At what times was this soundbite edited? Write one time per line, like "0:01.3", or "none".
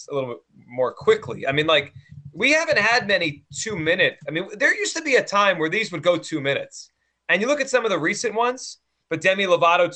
0:09.0